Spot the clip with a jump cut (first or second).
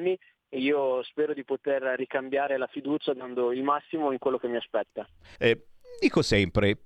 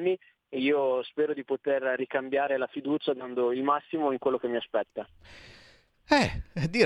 first